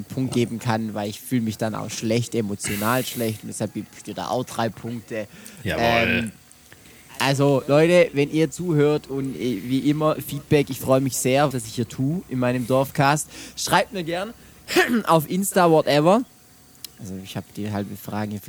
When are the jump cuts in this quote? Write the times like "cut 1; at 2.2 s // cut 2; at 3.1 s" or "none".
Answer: cut 1; at 11.5 s // cut 2; at 16.9 s